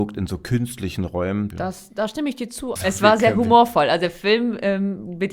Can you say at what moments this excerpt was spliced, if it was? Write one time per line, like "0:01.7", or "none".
0:01.5
0:02.8